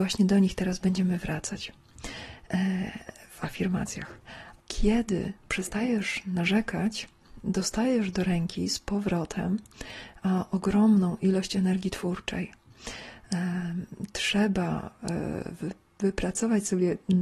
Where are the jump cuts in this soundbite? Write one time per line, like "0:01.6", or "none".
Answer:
0:04.6